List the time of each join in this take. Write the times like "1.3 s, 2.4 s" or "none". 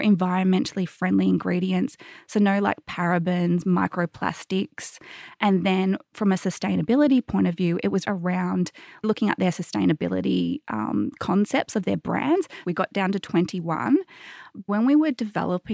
8.0 s, 12.6 s, 14.7 s